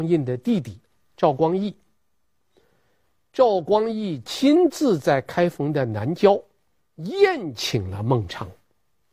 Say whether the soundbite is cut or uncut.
uncut